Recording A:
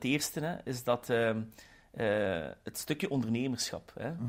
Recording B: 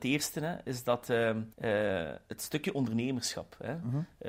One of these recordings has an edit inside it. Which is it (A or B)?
B